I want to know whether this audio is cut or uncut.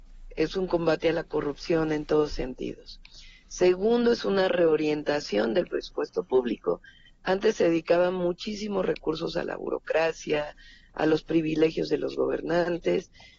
uncut